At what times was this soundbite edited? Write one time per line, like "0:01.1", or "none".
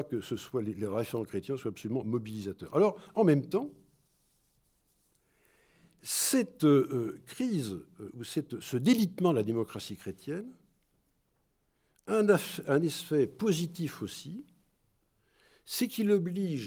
none